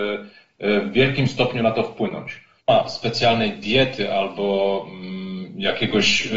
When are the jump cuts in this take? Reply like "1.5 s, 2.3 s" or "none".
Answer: 2.6 s